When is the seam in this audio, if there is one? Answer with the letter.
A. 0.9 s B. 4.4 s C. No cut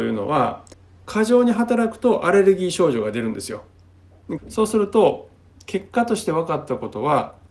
B